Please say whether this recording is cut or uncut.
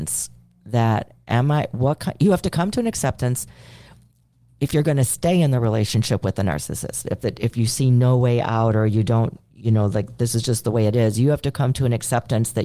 uncut